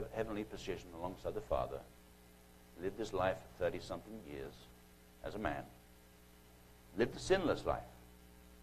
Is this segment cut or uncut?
cut